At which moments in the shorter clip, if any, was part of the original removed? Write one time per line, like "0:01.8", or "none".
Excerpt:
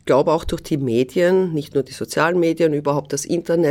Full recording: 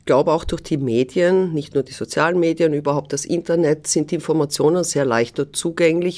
none

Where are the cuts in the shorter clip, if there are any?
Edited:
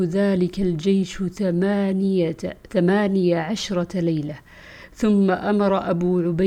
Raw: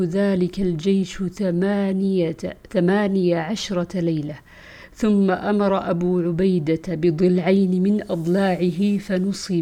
none

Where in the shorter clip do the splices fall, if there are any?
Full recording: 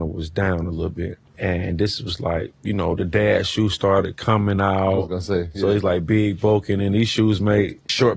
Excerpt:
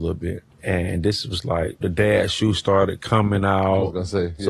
0:01.8

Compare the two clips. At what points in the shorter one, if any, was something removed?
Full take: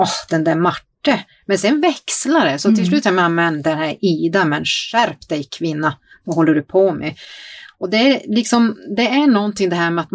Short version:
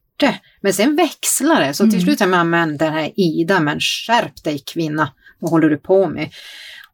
none

